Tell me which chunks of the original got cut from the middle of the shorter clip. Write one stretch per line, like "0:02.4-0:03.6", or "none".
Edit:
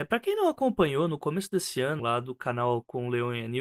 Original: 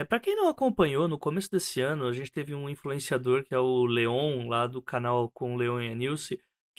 0:02.0-0:04.5